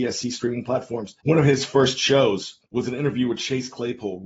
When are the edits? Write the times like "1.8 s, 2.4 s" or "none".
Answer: 1.2 s, 2.7 s